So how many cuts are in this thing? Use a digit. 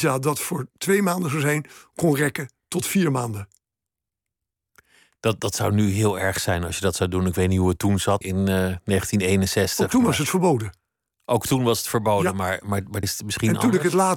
2